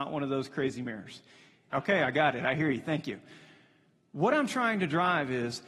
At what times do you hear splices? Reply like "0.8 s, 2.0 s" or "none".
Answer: 1.7 s